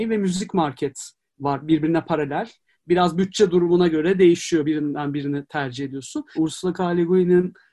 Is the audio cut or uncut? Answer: cut